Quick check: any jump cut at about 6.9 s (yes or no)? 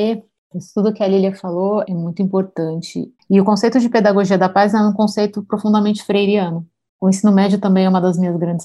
yes